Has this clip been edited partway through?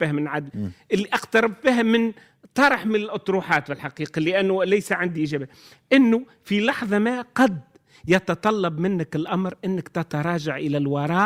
no; 0 cuts

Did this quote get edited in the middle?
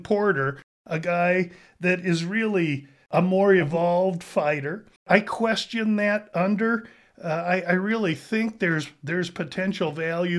yes; 1 cut; at 5.0 s

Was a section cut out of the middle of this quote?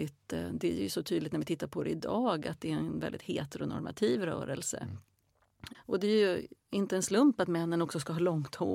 yes; 1 cut; at 5.7 s

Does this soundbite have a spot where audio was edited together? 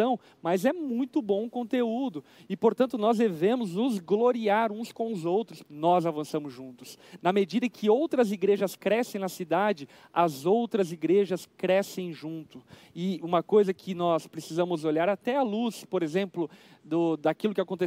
yes; 1 cut; at 5.6 s

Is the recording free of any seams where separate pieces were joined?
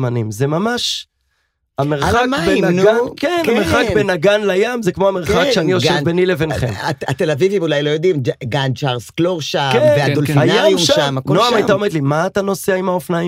yes; 0 cuts

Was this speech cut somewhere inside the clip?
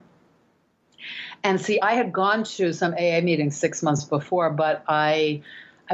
no; 0 cuts

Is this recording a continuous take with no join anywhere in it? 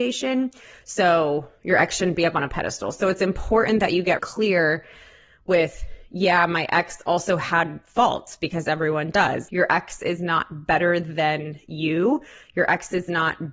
no; 2 cuts; at 4.2 s, 9.5 s

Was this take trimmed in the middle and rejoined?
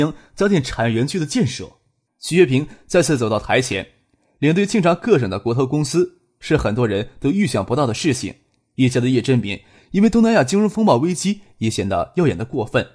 yes; 1 cut; at 2.1 s

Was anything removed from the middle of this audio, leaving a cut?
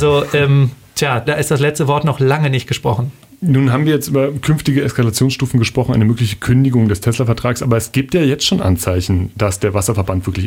yes; 1 cut; at 1.2 s

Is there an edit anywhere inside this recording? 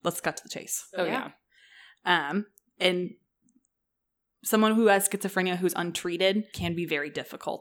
yes; 1 cut; at 6.5 s

